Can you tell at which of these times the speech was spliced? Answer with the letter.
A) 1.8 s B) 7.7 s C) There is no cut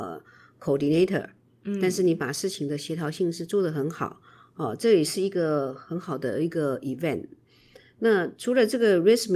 C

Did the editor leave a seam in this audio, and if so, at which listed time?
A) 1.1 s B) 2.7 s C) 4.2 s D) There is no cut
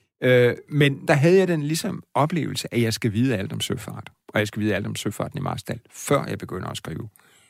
A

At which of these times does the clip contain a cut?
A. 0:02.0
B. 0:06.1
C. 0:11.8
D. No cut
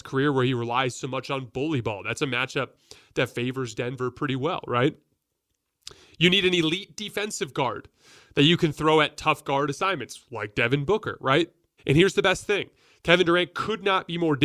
C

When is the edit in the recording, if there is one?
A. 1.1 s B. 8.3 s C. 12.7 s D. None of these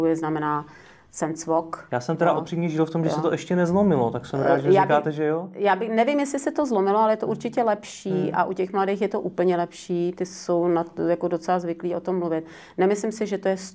D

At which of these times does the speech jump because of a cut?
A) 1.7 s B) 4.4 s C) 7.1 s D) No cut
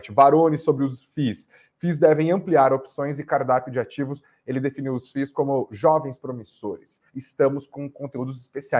C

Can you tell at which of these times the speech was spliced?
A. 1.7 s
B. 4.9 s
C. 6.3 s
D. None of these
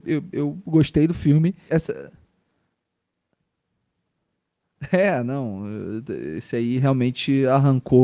A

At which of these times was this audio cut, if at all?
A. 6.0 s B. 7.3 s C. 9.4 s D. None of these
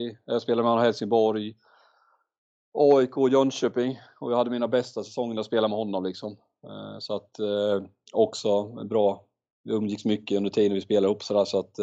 D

